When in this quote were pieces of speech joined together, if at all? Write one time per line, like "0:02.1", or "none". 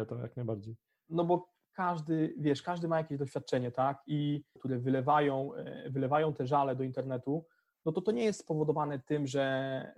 0:04.6